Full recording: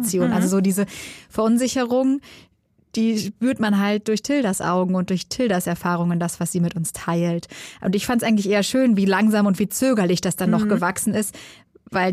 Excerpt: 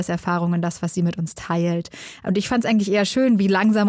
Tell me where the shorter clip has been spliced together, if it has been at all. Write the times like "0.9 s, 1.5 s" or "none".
none